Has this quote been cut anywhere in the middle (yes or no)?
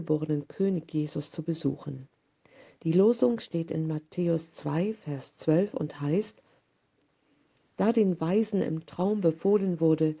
no